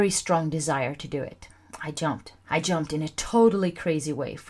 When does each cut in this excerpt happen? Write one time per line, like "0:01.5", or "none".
0:02.4